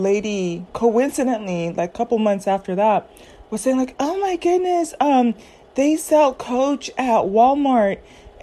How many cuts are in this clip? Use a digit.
0